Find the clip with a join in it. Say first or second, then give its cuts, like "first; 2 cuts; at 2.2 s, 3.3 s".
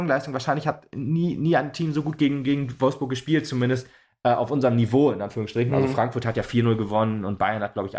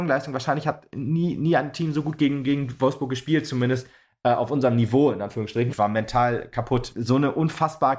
second; 2 cuts; at 5.7 s, 6.9 s